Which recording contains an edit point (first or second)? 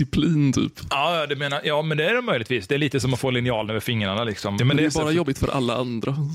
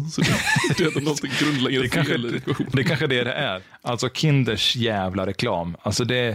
first